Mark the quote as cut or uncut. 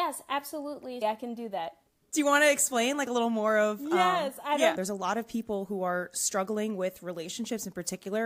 cut